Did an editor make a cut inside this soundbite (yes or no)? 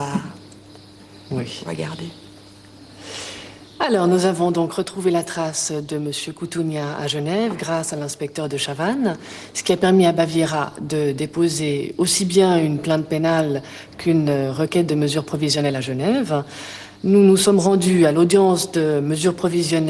no